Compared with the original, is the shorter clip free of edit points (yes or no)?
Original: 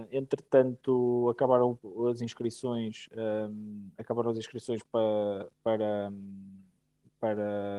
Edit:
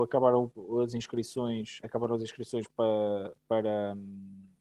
no